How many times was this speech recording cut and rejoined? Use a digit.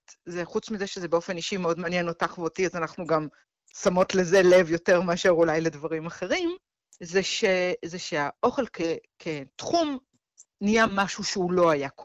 1